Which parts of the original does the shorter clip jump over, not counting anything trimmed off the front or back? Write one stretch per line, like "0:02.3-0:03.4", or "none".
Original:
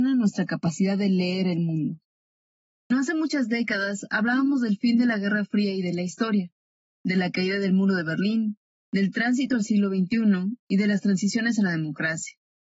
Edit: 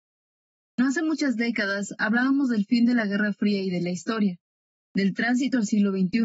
0:06.9-0:08.8